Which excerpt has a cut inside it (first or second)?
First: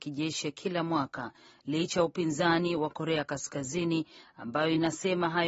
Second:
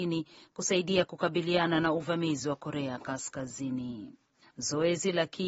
second